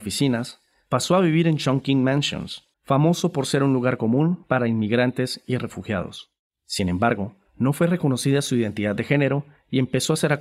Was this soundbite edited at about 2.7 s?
yes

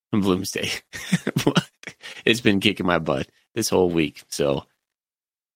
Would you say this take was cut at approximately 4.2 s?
no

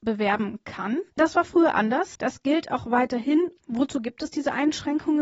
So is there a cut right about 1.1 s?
yes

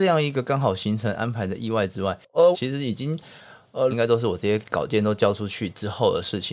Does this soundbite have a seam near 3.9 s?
yes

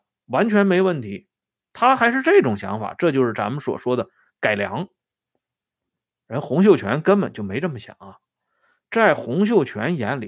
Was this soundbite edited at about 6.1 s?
no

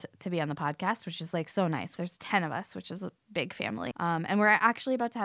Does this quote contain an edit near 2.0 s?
yes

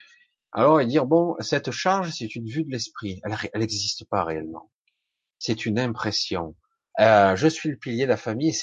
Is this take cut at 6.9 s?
yes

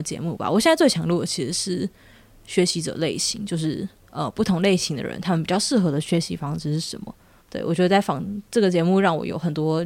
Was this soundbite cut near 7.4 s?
yes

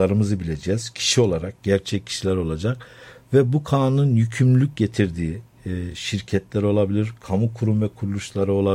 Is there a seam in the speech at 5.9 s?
no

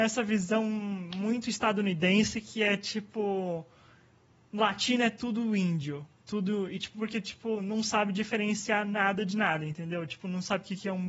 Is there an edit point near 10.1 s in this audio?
no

